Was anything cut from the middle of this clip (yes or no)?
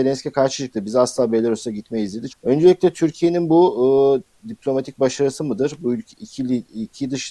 yes